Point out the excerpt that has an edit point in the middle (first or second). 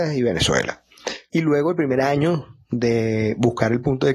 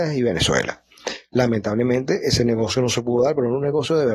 first